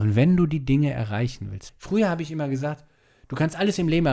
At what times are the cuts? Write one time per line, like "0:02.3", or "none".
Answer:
0:01.7